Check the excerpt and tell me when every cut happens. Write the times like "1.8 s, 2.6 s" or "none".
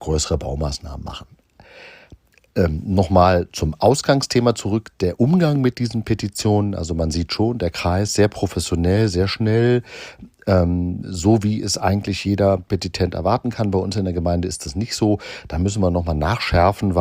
none